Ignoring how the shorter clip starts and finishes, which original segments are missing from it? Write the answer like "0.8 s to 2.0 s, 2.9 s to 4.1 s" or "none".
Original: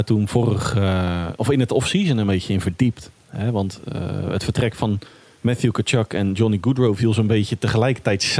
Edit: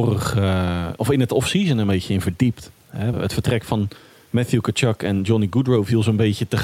3.5 s to 4.2 s